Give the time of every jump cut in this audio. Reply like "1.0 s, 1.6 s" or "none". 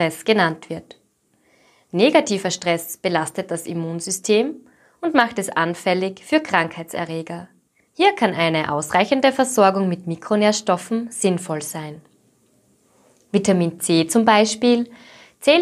7.9 s